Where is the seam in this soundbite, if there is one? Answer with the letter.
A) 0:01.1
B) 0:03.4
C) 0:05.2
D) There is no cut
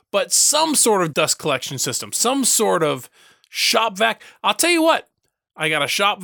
A